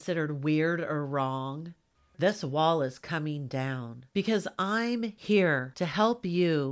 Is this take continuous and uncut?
yes; 0 cuts

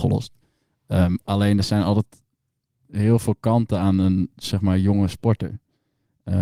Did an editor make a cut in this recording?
no; 0 cuts

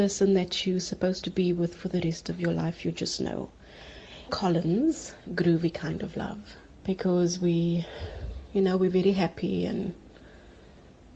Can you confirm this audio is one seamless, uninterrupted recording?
no; 2 cuts; at 4.3 s, 6.7 s

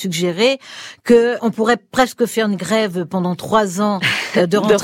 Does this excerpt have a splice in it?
yes; 1 cut; at 1.4 s

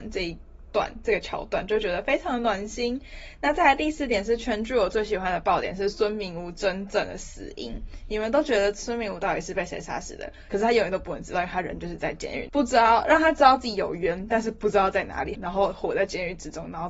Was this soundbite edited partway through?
yes; 3 cuts; at 10.5 s, 12.5 s, 15.3 s

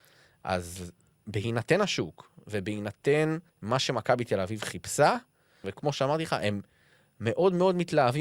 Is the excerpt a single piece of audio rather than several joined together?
no; 2 cuts; at 3.5 s, 5.6 s

